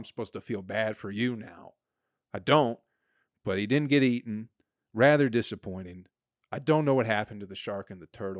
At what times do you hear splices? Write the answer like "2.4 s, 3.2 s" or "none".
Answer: none